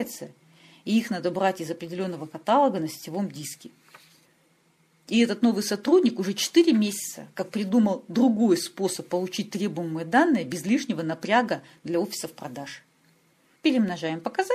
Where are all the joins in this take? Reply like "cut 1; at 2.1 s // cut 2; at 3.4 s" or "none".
cut 1; at 13.6 s